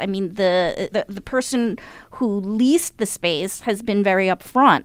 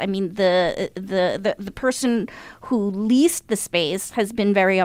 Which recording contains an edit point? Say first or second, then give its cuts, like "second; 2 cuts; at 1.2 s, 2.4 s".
first; 1 cut; at 0.9 s